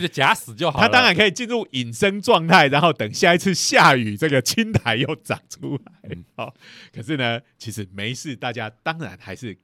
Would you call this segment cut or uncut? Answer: uncut